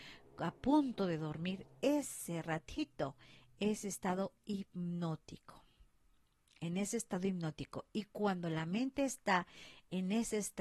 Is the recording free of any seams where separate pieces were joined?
yes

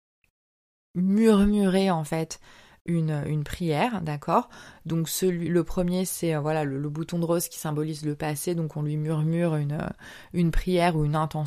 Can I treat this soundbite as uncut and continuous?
yes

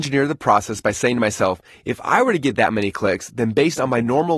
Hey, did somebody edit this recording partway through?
no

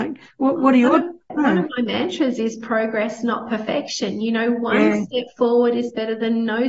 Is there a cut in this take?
yes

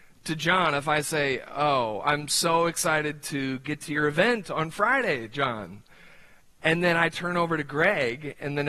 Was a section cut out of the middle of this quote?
no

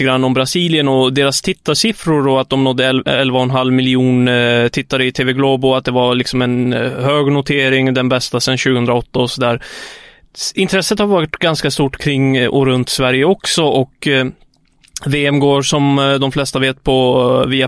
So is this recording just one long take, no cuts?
yes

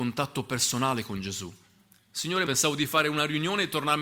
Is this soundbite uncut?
no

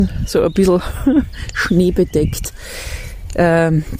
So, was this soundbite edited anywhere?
no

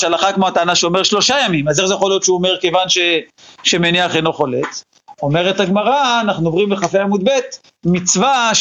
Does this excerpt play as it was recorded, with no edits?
yes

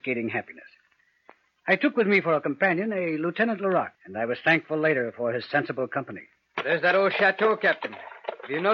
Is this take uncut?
no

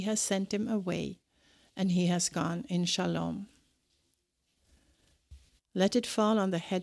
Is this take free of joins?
no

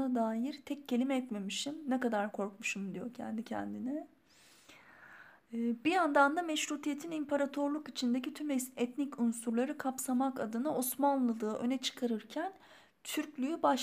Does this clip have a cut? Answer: no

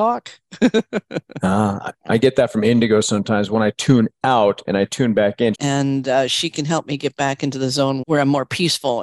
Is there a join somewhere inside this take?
yes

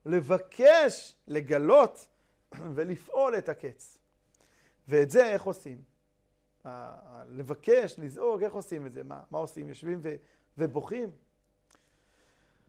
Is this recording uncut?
yes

